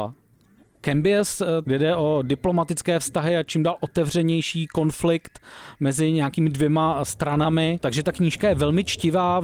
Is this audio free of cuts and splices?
no; 1 cut; at 1.6 s

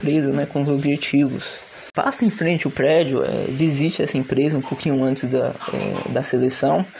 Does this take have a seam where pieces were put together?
no; 0 cuts

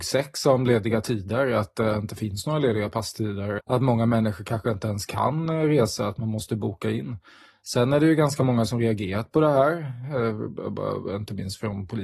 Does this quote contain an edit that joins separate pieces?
yes; 1 cut; at 3.6 s

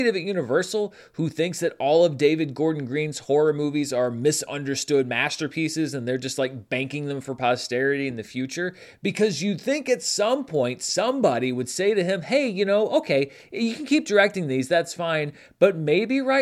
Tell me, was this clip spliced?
no; 0 cuts

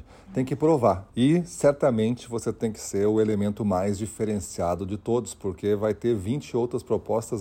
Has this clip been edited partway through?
yes; 1 cut; at 1.1 s

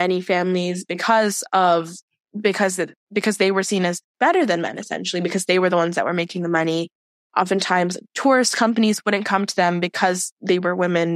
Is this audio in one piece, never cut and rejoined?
yes; 0 cuts

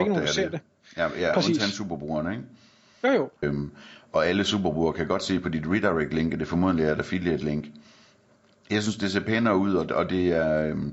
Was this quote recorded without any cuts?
no; 1 cut; at 3.4 s

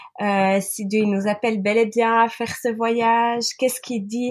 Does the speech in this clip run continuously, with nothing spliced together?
yes; 0 cuts

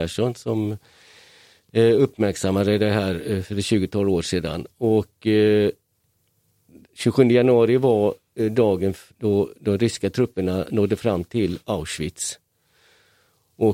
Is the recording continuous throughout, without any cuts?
yes; 0 cuts

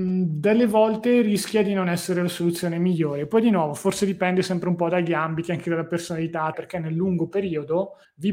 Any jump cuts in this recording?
yes; 1 cut; at 6.5 s

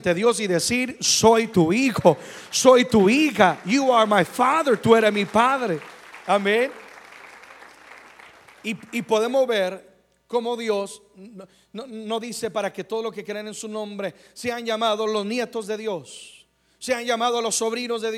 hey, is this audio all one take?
yes; 0 cuts

